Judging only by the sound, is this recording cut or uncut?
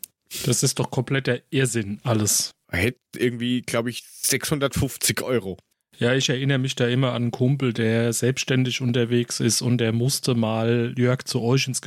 cut